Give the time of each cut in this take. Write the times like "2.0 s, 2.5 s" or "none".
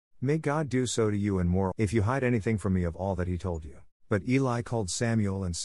1.7 s, 3.9 s